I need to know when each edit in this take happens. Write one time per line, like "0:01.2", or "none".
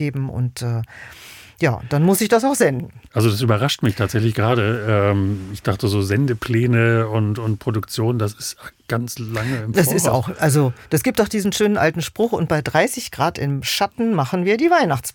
0:03.1